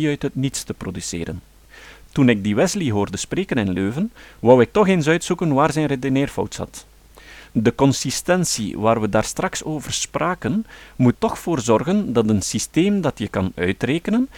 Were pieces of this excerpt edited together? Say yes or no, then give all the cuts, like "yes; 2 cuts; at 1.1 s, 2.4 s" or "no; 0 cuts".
yes; 1 cut; at 11.1 s